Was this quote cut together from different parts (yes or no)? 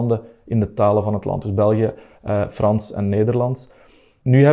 no